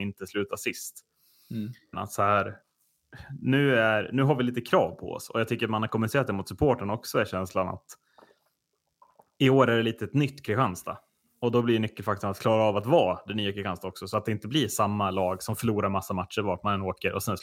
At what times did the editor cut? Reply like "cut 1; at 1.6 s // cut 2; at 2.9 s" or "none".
cut 1; at 1.9 s

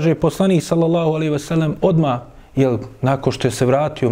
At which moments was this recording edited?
none

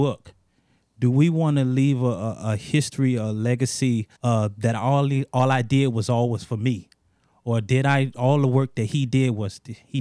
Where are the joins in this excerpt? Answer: cut 1; at 4.1 s

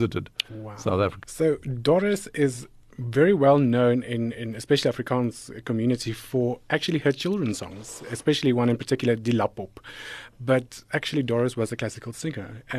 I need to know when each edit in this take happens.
cut 1; at 1.2 s

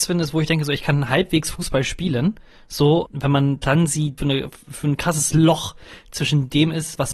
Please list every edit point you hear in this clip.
cut 1; at 3.0 s // cut 2; at 4.2 s

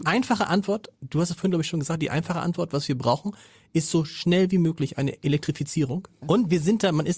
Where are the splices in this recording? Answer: cut 1; at 6.2 s

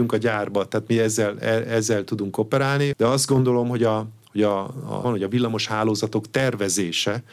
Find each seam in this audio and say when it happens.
cut 1; at 2.9 s // cut 2; at 5.0 s

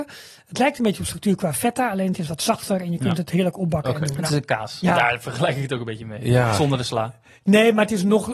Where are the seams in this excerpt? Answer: cut 1; at 4.8 s

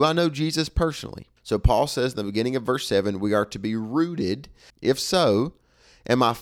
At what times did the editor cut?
cut 1; at 1.4 s // cut 2; at 4.7 s

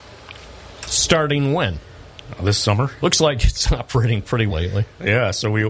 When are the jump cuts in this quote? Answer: cut 1; at 3.0 s // cut 2; at 4.5 s

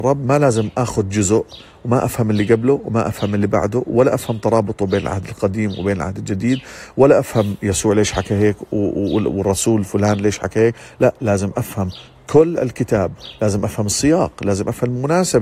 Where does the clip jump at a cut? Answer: none

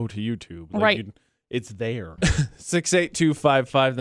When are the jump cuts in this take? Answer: cut 1; at 2.2 s

